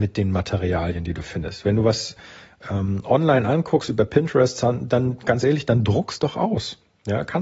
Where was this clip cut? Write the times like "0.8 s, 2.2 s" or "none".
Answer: none

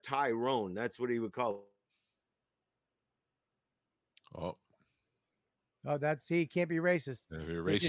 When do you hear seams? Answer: none

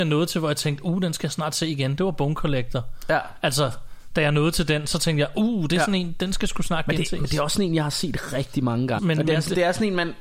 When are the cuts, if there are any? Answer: 9.0 s

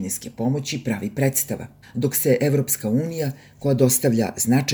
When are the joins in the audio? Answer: 1.8 s

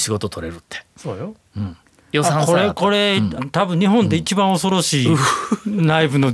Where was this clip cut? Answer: 3.4 s

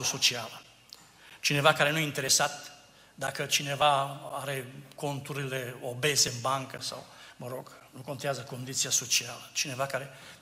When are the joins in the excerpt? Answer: none

